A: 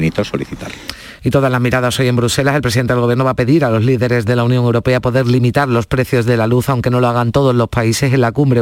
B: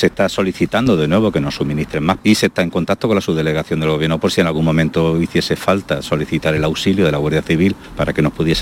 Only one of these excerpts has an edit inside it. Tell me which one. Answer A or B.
B